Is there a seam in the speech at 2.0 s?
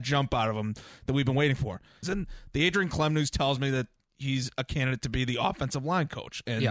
yes; 1 cut; at 2.0 s

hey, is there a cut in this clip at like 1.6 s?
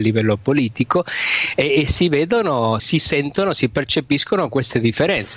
no; 1 cut; at 2.8 s

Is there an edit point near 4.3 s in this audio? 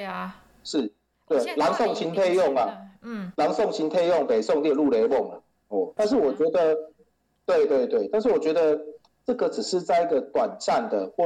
no; 1 cut; at 6.0 s

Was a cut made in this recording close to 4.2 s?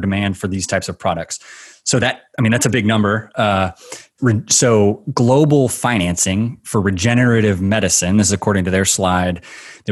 yes; 1 cut; at 4.2 s

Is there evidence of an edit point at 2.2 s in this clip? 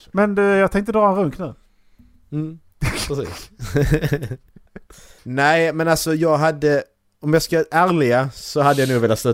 no; 1 cut; at 5.2 s

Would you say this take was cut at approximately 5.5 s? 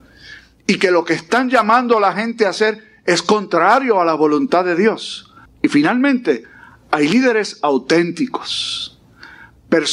yes; 1 cut; at 5.5 s

